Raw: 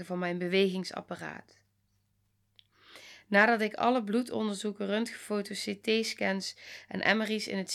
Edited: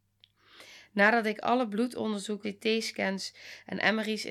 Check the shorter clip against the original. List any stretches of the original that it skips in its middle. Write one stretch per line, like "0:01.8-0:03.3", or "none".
0:04.8-0:05.7